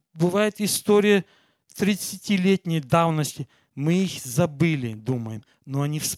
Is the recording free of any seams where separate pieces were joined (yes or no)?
yes